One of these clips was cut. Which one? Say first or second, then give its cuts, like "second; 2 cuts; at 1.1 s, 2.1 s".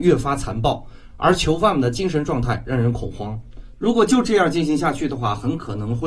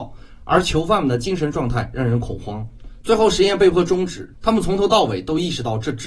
second; 2 cuts; at 3.0 s, 4.3 s